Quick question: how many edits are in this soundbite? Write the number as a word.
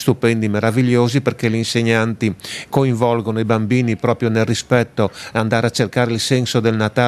zero